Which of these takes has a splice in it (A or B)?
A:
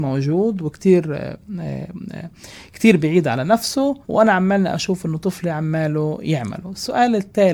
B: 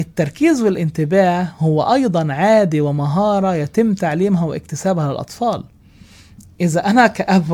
A